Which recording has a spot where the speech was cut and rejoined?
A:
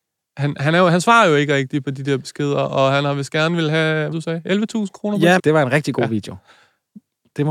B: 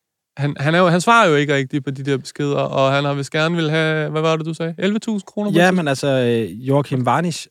A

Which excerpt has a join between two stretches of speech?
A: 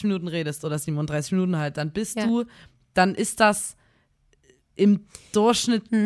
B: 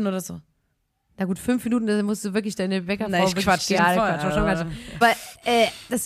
B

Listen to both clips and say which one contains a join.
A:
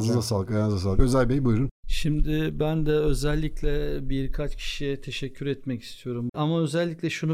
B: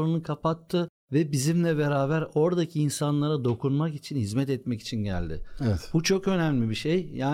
A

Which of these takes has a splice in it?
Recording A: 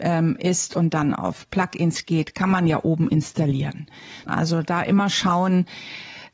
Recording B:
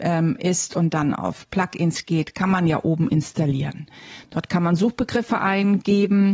A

